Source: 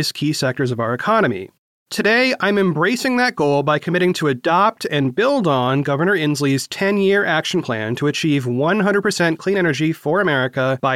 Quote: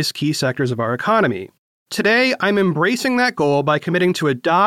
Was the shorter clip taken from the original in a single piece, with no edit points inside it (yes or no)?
yes